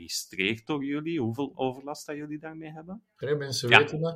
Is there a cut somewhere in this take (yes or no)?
yes